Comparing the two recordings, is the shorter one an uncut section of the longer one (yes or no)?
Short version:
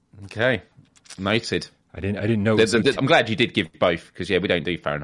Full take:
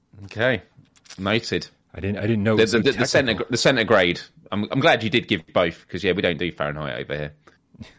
no